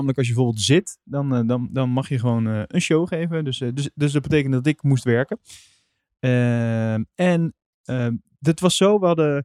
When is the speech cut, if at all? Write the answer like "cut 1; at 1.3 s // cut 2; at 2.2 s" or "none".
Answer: none

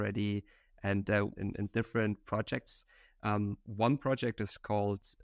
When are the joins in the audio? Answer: cut 1; at 1.4 s

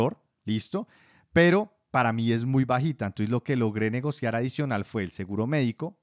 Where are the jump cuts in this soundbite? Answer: none

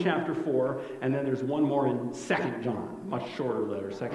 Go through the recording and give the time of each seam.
none

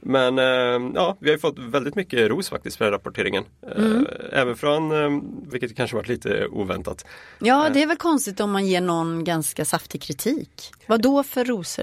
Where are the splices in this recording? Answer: cut 1; at 5.5 s

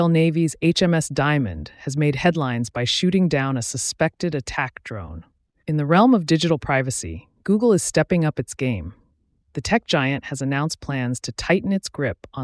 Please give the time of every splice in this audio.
cut 1; at 5.6 s

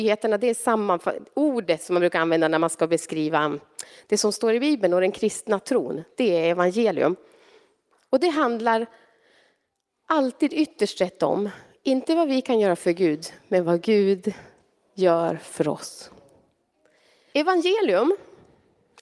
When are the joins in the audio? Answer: cut 1; at 17.3 s

